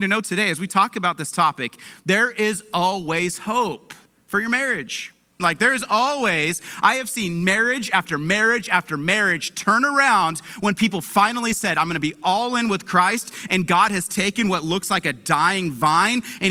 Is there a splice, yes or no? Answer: yes